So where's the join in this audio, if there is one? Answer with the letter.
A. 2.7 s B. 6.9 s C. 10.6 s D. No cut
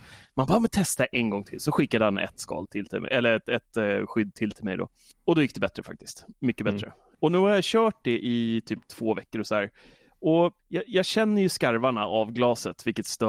C